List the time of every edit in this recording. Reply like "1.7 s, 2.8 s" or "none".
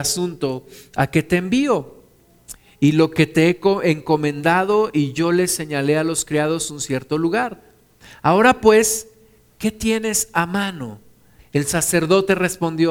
11.4 s